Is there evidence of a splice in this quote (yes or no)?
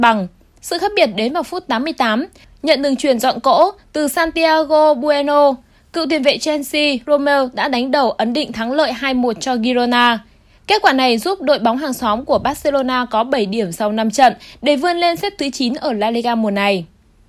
yes